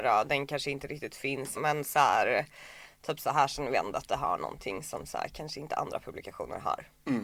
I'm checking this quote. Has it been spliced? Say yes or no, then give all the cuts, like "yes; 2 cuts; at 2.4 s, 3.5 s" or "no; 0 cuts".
yes; 1 cut; at 1.5 s